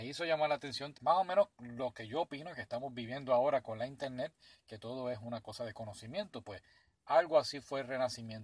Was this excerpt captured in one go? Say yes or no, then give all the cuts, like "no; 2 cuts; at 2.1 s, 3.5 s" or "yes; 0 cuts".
no; 1 cut; at 0.9 s